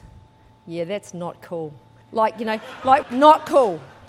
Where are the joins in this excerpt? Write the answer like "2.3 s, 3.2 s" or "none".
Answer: 2.0 s, 3.0 s